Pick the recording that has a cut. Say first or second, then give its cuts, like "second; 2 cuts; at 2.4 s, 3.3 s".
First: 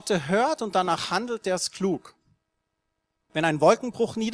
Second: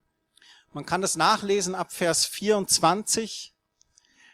first; 1 cut; at 3.3 s